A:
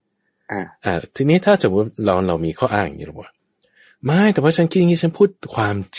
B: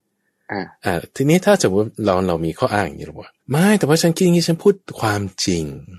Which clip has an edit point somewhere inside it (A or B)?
B